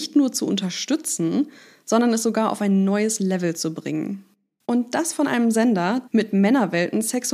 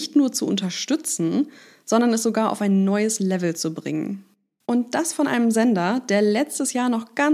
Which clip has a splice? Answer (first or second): first